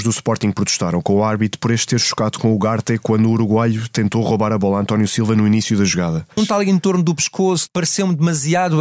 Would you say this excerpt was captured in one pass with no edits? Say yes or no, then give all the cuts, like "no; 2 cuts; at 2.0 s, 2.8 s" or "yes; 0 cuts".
no; 2 cuts; at 6.4 s, 7.7 s